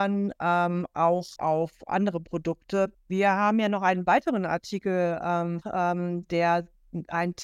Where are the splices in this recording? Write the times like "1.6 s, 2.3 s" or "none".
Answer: 1.4 s, 2.9 s, 5.6 s